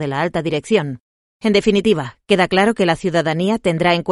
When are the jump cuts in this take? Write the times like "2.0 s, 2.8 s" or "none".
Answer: 1.3 s